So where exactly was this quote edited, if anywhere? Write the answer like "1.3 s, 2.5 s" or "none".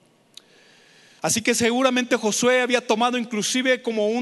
1.2 s